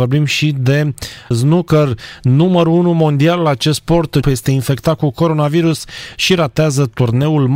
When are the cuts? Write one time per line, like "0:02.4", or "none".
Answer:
0:01.3
0:04.2